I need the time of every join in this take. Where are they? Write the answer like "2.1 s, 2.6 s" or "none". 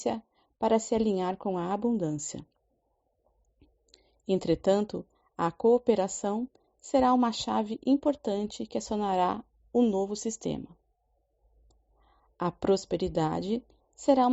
none